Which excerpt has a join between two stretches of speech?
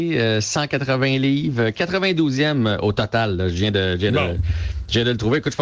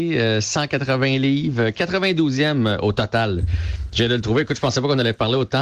second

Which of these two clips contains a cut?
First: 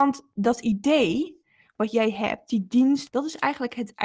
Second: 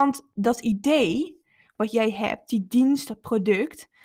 first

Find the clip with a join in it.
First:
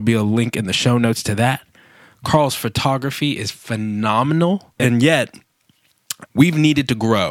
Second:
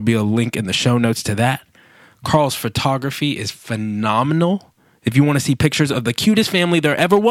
first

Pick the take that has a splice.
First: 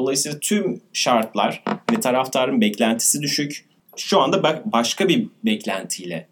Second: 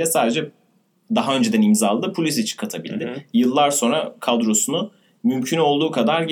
first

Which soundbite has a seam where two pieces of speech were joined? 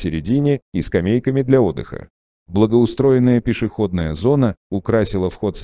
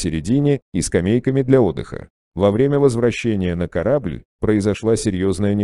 second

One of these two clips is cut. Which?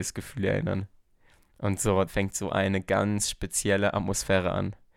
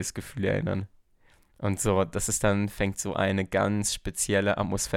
first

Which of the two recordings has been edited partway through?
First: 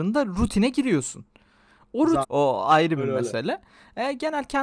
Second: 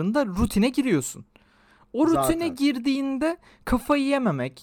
first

